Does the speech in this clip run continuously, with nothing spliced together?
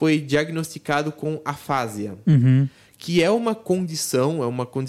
yes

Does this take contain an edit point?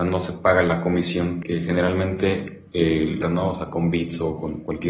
yes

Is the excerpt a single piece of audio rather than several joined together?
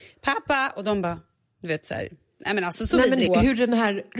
no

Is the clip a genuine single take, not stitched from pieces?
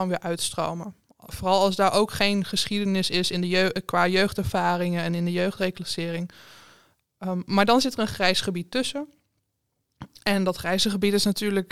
yes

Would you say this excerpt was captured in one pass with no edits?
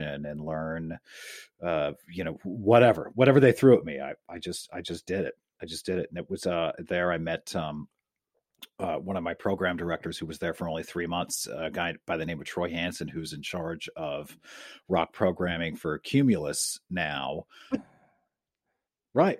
no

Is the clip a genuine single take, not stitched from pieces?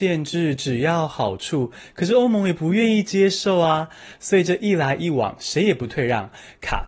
yes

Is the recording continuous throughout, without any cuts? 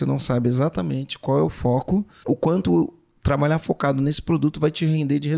no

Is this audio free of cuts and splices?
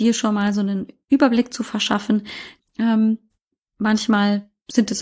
no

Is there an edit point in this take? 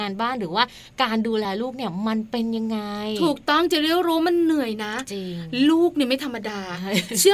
no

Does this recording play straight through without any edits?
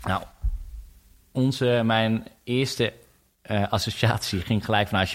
yes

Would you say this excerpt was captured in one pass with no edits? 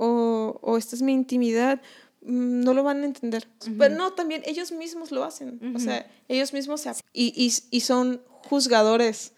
no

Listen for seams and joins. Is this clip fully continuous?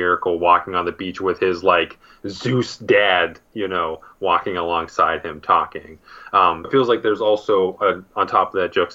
no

